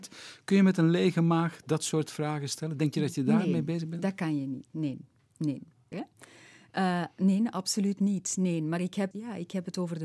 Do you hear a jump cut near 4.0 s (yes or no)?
no